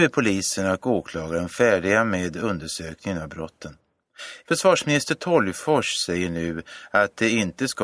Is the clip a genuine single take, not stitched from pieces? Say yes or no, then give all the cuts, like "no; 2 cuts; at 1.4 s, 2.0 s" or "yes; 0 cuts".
no; 1 cut; at 4.4 s